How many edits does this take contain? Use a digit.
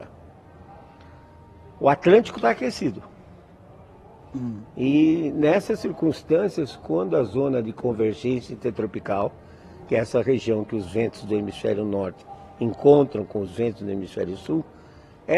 0